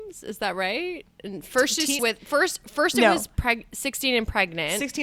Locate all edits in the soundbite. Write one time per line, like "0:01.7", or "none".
0:02.0